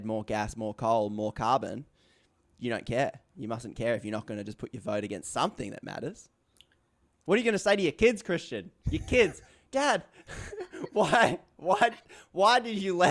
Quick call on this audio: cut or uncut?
uncut